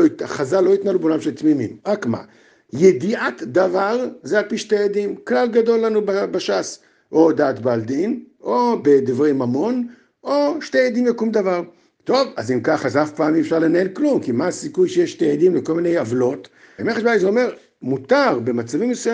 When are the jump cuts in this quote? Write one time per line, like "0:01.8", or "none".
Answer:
0:16.8